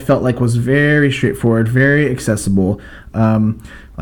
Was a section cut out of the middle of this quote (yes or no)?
yes